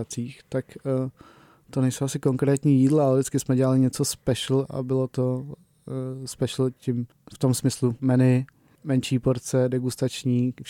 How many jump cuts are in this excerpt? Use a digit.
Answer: 1